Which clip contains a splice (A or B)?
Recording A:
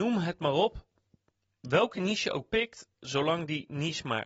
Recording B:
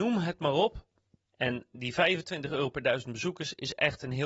B